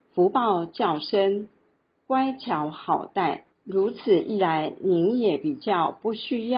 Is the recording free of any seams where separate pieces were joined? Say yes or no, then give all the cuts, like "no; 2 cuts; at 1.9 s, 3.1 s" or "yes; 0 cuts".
no; 1 cut; at 3.5 s